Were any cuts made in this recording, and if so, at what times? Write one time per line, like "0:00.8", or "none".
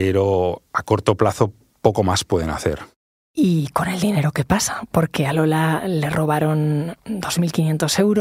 none

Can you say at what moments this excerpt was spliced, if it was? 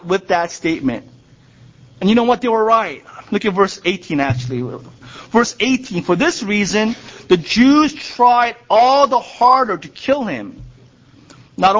0:05.0

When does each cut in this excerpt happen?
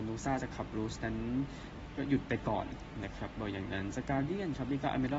none

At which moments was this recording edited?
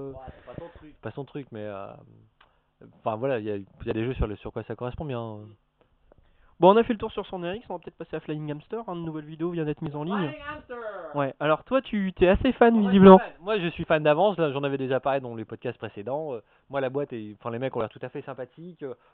0:00.9

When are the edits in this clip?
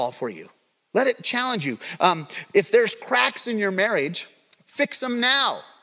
none

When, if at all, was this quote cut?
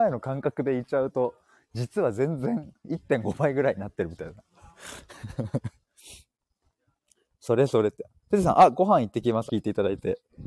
0:09.5

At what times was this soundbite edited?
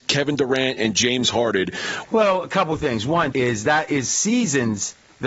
0:02.1
0:03.3

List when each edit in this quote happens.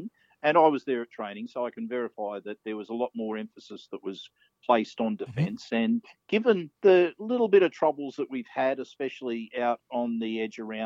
0:06.8

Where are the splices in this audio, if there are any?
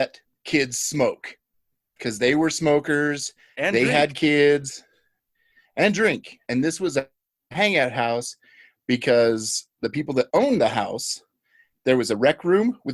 0:06.5

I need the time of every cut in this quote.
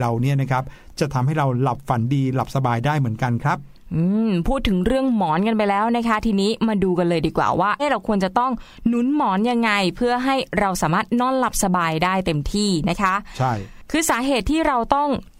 0:07.8

